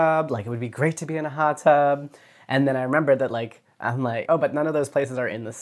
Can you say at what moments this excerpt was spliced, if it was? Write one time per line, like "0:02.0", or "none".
0:04.3